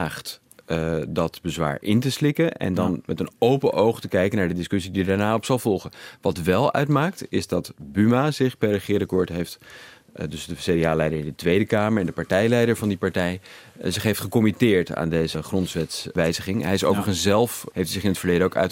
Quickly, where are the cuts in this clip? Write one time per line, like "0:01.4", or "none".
0:17.7